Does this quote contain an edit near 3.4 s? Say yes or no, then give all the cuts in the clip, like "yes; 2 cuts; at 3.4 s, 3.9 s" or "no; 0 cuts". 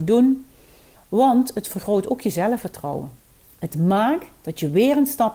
no; 1 cut; at 0.9 s